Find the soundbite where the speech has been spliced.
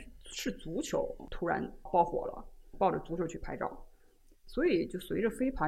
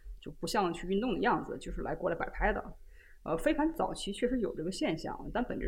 first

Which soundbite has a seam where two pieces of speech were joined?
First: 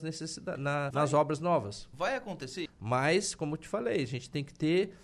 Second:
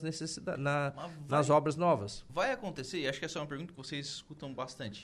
first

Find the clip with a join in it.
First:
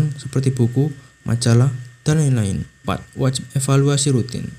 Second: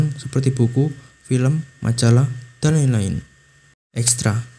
first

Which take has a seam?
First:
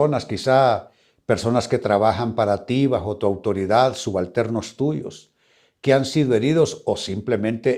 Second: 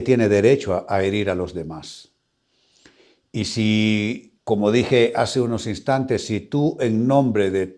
second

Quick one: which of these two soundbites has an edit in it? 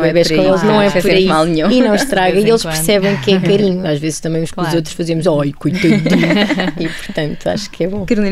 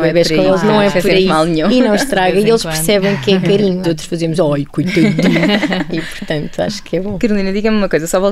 second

